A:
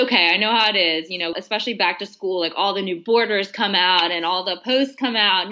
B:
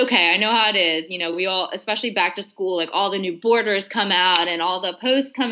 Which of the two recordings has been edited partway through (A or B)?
A